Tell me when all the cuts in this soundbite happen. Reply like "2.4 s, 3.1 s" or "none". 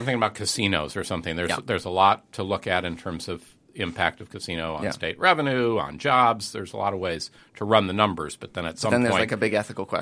none